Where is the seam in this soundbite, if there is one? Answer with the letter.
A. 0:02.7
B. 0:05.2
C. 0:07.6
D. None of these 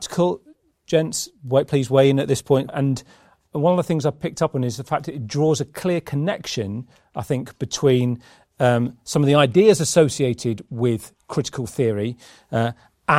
A